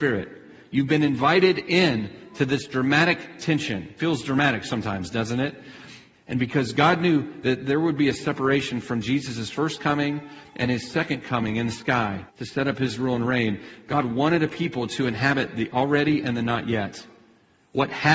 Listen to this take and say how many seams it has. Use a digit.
2